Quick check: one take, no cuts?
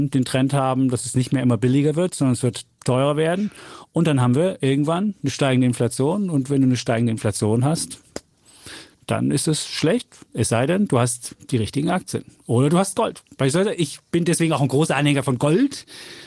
yes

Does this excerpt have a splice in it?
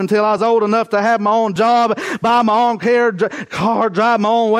no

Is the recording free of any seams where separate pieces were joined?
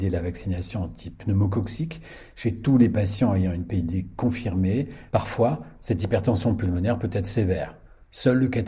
no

